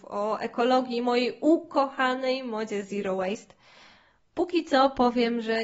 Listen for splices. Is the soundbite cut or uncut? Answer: cut